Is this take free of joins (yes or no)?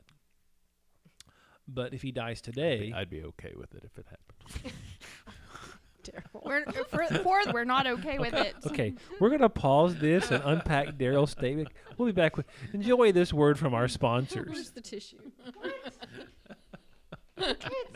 no